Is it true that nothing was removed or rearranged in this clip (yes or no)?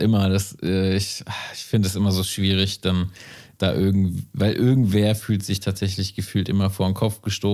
yes